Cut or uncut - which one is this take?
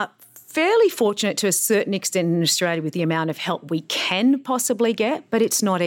uncut